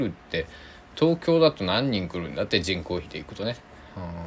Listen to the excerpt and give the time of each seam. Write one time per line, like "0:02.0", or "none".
none